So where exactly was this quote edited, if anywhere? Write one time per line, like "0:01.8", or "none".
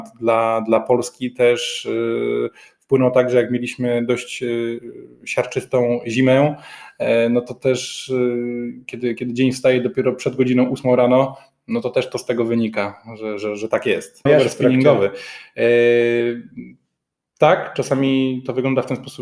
0:14.3